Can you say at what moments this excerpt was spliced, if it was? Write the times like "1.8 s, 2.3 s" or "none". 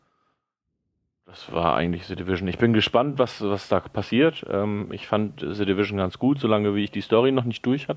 none